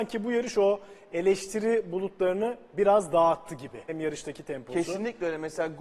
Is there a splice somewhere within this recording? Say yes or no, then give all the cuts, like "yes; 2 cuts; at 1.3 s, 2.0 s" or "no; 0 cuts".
yes; 1 cut; at 3.9 s